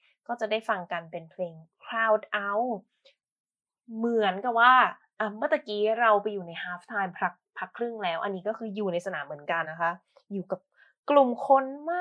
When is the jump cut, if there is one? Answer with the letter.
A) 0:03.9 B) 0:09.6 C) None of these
B